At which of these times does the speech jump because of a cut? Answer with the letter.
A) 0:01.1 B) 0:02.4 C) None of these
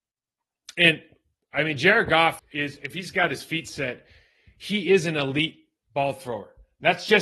B